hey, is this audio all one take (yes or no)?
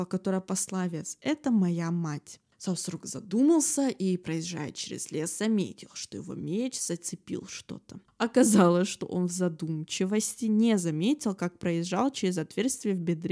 yes